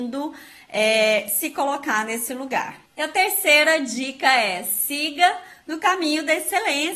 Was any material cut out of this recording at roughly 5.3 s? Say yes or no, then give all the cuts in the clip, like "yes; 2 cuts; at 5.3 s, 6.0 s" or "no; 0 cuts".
no; 1 cut; at 2.9 s